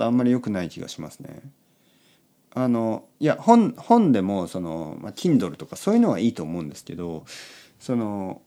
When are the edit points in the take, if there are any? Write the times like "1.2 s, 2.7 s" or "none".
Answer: none